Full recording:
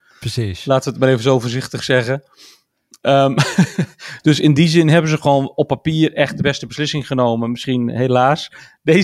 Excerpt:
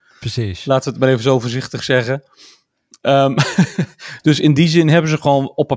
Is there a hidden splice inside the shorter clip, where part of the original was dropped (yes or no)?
no